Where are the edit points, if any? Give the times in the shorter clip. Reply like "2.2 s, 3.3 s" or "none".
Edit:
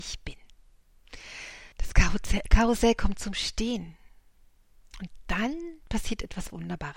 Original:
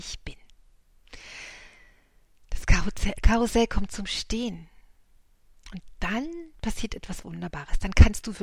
1.7 s